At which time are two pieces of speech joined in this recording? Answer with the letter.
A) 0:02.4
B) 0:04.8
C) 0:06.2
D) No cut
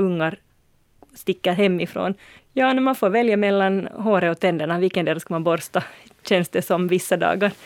A